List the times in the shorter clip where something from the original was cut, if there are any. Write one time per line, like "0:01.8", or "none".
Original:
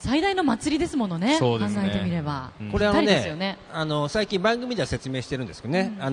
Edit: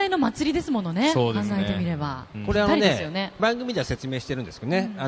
0:03.4